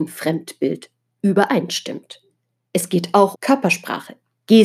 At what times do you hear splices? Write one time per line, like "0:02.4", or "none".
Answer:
0:03.3